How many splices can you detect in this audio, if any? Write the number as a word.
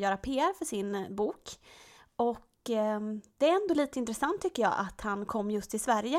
zero